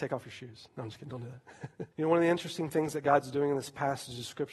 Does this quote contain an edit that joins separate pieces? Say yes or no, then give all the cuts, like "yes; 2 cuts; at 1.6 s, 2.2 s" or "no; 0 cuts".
yes; 1 cut; at 1.9 s